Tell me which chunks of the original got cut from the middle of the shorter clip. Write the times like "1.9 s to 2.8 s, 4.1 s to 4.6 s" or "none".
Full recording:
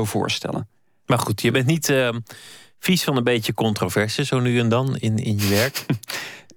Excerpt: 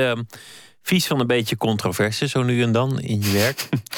5.0 s to 5.2 s